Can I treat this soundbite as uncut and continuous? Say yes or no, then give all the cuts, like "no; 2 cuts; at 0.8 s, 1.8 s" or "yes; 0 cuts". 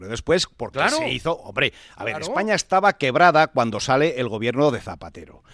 yes; 0 cuts